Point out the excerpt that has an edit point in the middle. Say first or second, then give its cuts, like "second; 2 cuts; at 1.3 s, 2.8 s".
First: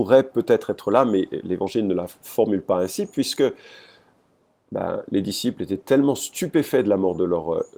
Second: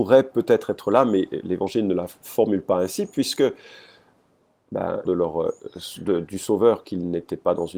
second; 1 cut; at 5.1 s